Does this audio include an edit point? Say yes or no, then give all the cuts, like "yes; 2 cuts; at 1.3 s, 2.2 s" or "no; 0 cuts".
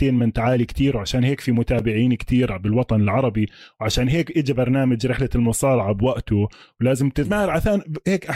yes; 1 cut; at 7.3 s